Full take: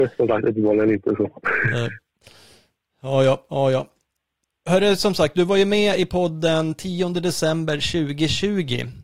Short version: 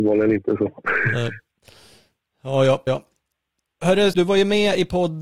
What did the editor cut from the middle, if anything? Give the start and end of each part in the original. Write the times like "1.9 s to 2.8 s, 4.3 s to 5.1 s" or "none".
3.5 s to 3.7 s, 5.0 s to 5.3 s